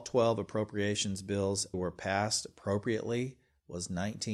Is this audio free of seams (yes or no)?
no